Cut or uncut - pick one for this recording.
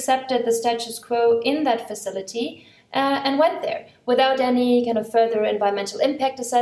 uncut